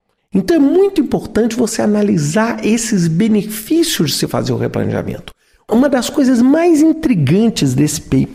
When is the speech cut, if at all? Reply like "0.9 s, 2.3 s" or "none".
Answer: none